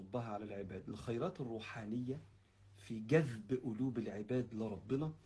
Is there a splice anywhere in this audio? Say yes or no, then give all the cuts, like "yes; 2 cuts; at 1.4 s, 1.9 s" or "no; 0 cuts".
no; 0 cuts